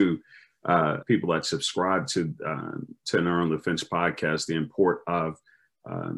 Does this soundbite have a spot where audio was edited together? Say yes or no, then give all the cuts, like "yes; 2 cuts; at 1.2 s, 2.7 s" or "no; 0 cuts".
yes; 1 cut; at 1.0 s